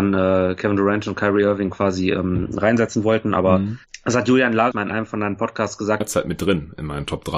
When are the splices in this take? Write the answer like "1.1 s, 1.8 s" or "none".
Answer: 4.7 s, 6.0 s